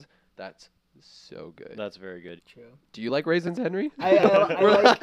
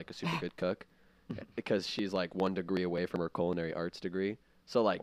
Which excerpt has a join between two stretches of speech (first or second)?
first